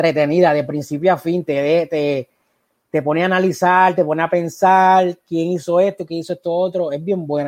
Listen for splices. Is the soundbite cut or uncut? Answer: uncut